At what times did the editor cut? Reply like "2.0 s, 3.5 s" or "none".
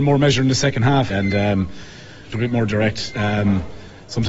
1.1 s, 2.3 s